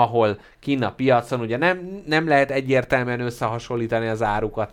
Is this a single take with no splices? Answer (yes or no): yes